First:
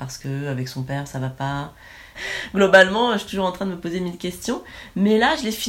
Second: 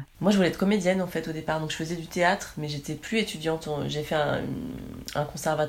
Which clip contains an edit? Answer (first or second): first